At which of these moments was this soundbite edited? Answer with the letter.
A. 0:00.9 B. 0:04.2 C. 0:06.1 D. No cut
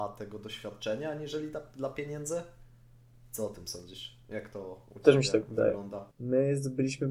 C